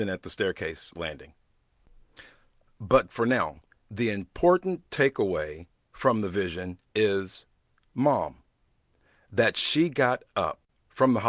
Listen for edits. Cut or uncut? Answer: uncut